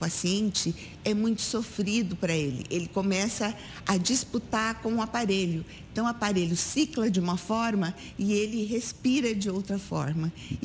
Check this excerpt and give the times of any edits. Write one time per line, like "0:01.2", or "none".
none